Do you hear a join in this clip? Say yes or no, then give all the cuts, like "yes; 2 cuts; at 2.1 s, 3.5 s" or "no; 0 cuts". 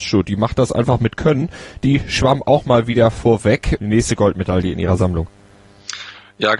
yes; 1 cut; at 3.8 s